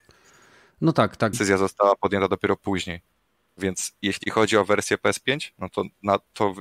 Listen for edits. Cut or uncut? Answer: cut